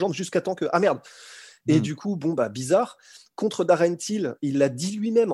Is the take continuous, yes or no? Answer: yes